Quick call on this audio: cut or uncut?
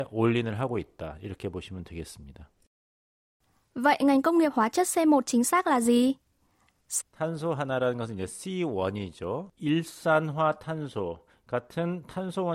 cut